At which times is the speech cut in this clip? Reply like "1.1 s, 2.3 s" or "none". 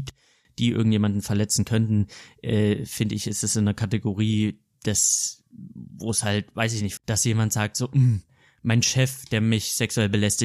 7.0 s